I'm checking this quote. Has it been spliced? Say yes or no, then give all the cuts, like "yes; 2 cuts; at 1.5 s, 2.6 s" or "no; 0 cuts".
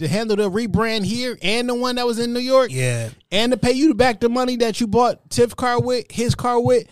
no; 0 cuts